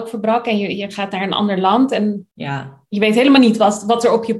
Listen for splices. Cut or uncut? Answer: cut